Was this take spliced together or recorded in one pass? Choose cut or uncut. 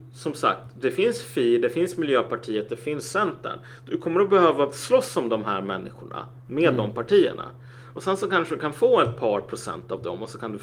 uncut